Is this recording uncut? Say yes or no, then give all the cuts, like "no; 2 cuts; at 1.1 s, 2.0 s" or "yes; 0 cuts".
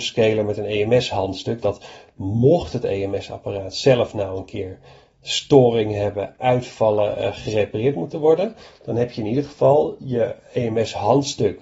yes; 0 cuts